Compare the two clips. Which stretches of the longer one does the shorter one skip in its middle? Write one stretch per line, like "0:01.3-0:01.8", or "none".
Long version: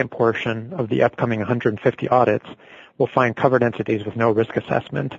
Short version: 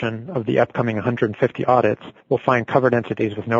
0:02.6-0:02.9